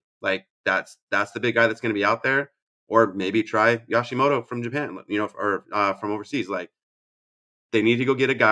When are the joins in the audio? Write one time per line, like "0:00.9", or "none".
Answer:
none